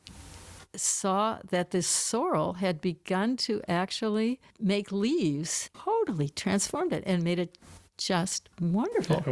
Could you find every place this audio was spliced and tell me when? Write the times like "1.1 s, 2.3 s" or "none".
5.7 s